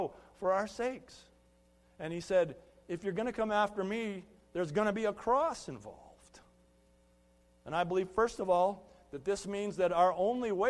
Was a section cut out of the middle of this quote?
yes; 1 cut; at 7.5 s

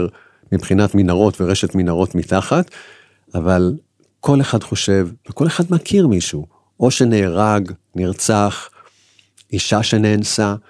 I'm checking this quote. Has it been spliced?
no; 0 cuts

